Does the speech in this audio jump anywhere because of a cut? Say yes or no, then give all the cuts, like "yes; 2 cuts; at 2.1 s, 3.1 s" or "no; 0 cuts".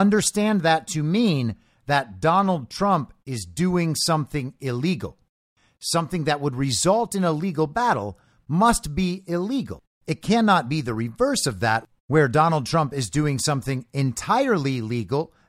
no; 0 cuts